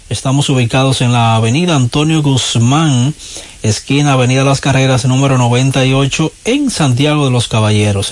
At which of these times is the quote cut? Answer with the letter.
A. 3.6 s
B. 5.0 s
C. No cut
C